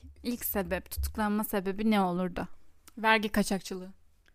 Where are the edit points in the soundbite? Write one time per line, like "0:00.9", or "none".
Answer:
none